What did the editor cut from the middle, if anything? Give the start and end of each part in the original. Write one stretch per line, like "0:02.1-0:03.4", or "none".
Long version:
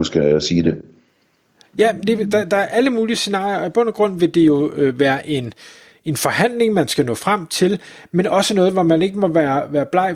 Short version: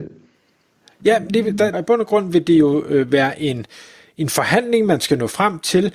0:02.5-0:03.6